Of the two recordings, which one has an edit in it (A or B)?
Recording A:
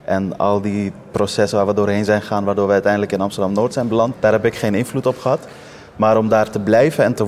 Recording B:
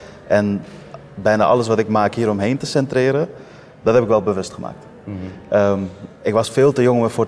A